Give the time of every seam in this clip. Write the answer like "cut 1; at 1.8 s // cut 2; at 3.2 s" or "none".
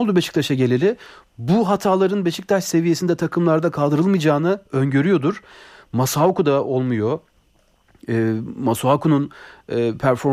none